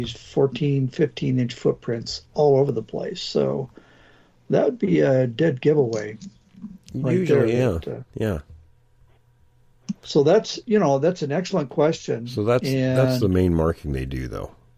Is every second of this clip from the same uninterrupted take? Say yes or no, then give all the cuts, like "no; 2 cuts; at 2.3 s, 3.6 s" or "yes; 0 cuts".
yes; 0 cuts